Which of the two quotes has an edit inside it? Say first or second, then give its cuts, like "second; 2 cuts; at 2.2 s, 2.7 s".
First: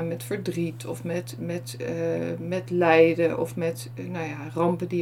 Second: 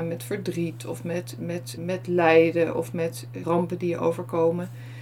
second; 2 cuts; at 1.8 s, 3.4 s